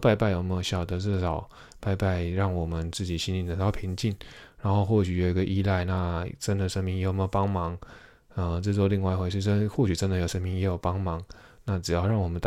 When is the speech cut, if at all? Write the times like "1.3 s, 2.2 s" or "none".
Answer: none